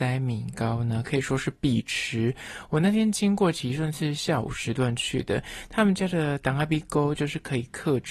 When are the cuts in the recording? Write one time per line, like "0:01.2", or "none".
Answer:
none